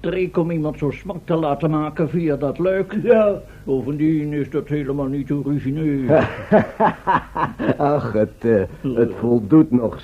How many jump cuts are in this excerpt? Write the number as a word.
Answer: zero